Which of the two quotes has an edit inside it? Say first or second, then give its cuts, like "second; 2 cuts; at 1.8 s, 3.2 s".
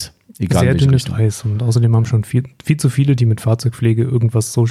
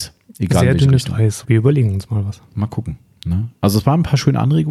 second; 1 cut; at 1.4 s